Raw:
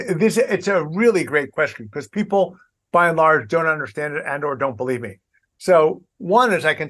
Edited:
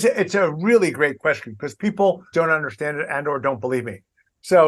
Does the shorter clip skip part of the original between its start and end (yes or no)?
yes